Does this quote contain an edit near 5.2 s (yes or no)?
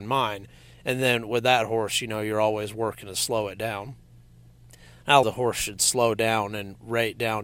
yes